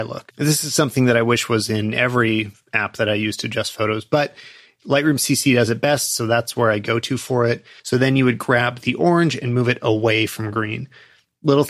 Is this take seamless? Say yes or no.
no